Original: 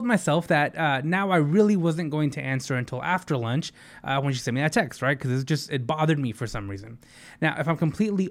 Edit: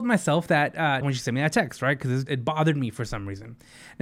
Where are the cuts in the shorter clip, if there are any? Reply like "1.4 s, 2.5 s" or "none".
1.0 s, 2.3 s

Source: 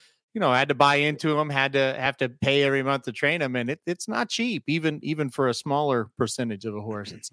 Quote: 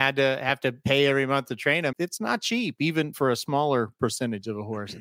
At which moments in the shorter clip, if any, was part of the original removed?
1.9 s, 3.1 s

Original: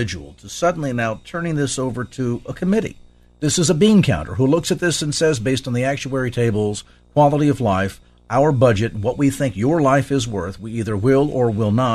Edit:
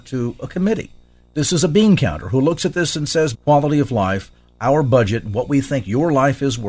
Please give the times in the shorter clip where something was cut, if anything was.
3.3 s

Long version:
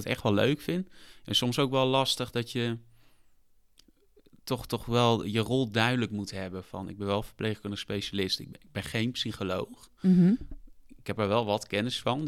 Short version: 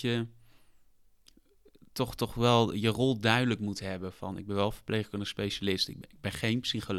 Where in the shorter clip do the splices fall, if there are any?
none

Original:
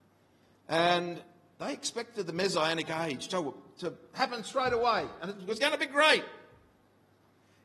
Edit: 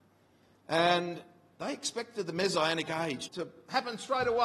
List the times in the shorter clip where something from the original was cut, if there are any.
3.3 s

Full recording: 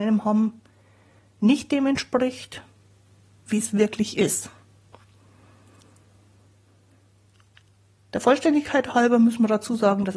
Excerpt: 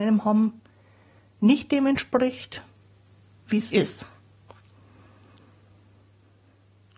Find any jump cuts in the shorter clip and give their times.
3.7 s

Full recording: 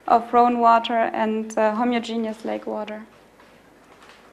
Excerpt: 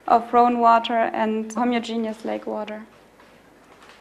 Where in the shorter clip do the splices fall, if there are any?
1.5 s

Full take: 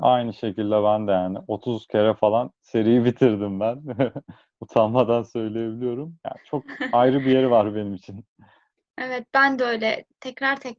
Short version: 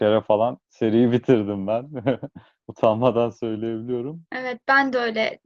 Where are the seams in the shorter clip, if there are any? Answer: 4.3 s

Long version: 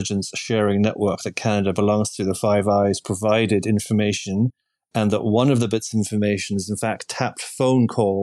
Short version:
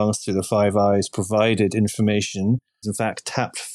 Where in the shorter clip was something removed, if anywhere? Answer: 2.8 s

